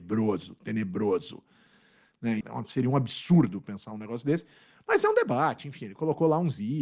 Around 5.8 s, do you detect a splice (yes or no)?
no